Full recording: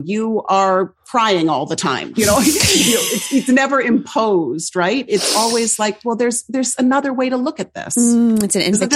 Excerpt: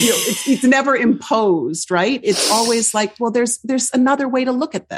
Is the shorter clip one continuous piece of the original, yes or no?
yes